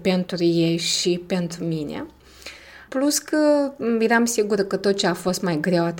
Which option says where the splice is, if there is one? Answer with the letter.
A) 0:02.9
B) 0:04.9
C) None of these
A